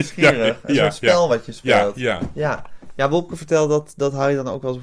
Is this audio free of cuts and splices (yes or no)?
yes